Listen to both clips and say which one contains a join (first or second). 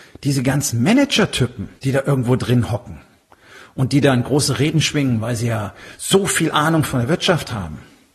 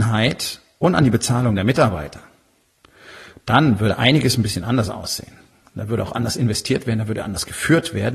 first